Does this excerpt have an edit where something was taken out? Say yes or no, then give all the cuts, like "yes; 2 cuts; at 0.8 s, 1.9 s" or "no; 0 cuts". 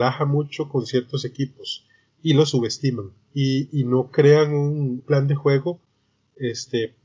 yes; 2 cuts; at 3.3 s, 5.0 s